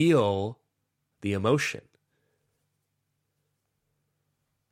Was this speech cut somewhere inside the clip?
no; 0 cuts

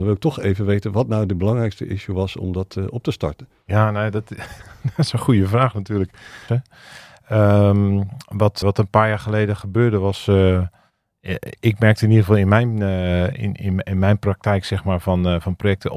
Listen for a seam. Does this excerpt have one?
yes; 2 cuts; at 6.5 s, 8.6 s

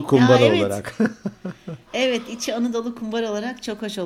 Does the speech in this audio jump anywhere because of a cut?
no; 0 cuts

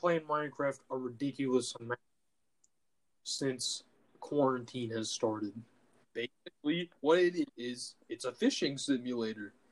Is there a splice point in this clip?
yes; 2 cuts; at 6.0 s, 7.5 s

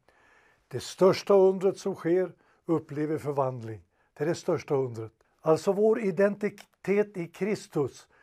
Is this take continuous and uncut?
no; 2 cuts; at 2.5 s, 5.2 s

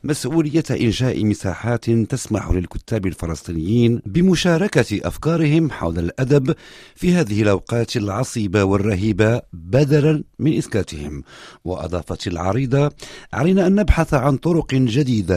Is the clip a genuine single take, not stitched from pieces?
yes; 0 cuts

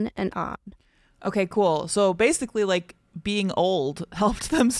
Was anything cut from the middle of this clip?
no; 0 cuts

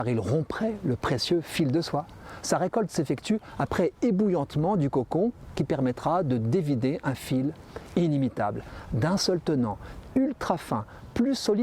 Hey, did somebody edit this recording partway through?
no; 0 cuts

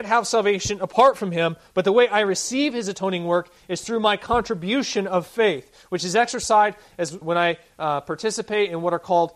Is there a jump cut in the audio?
yes; 1 cut; at 7.2 s

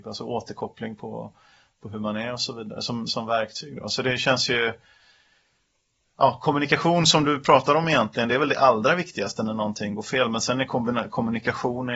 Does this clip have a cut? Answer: yes; 2 cuts; at 3.1 s, 8.3 s

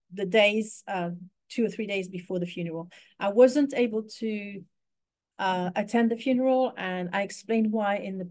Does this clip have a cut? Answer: no; 0 cuts

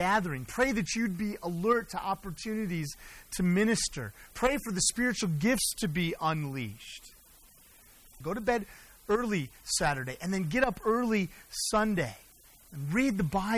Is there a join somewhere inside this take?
yes; 2 cuts; at 4.3 s, 8.2 s

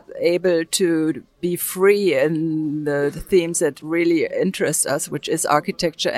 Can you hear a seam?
no; 0 cuts

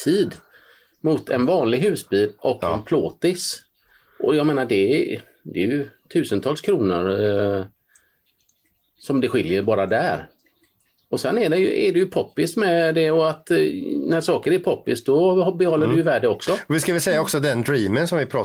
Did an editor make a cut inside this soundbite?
no; 0 cuts

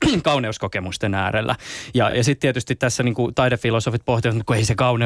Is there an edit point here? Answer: no; 0 cuts

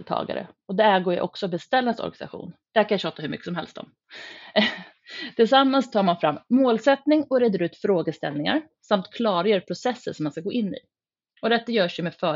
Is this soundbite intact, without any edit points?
no; 1 cut; at 2.6 s

